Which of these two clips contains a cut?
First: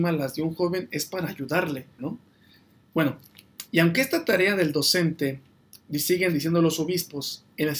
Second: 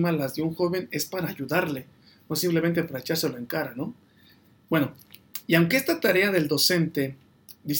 first; 1 cut; at 2.0 s

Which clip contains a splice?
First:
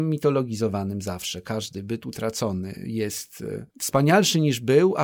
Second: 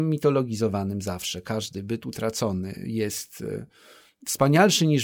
first; 1 cut; at 3.7 s

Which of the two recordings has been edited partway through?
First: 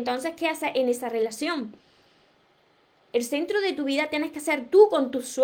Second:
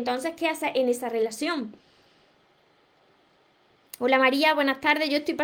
first; 1 cut; at 3.1 s

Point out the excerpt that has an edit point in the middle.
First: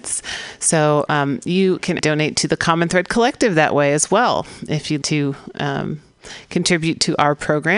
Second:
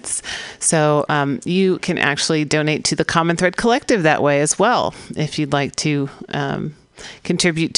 first; 2 cuts; at 2.0 s, 5.0 s

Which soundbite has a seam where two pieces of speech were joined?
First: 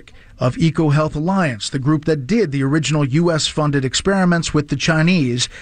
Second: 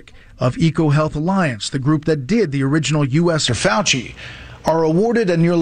second; 1 cut; at 3.5 s

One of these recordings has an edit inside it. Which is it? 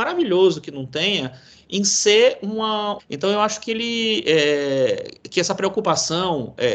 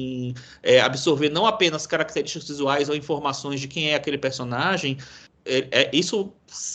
first; 1 cut; at 3.0 s

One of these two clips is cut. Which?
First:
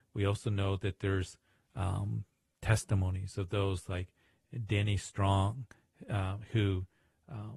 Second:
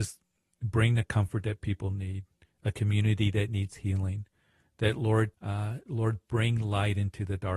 second; 1 cut; at 5.3 s

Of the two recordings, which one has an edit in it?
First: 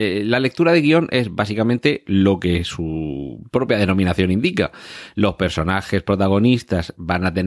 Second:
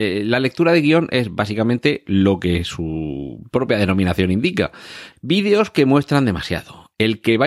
second; 1 cut; at 5.1 s

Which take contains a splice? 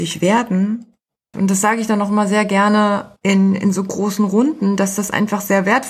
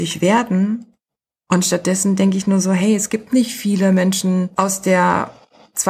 first; 1 cut; at 1.3 s

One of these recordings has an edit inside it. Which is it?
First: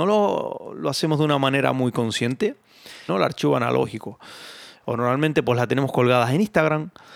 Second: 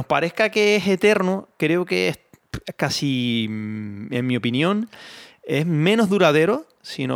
first; 2 cuts; at 3.1 s, 4.8 s

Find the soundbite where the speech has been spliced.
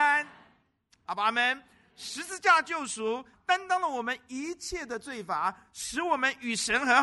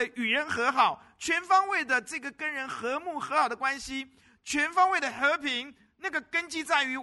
first; 2 cuts; at 1.0 s, 3.3 s

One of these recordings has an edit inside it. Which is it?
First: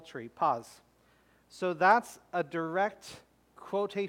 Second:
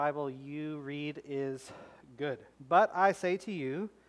second; 1 cut; at 2.5 s

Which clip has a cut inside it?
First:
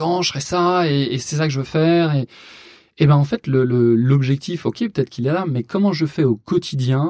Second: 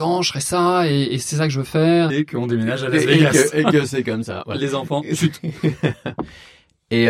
second; 1 cut; at 2.1 s

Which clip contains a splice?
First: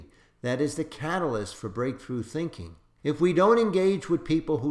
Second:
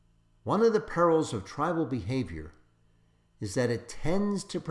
first; 1 cut; at 3.0 s

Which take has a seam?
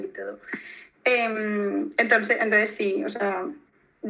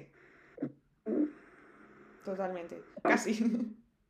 second; 1 cut; at 3.0 s

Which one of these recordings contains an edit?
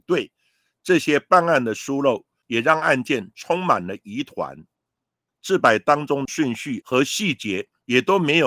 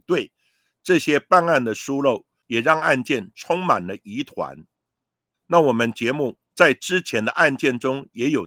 first; 1 cut; at 5.3 s

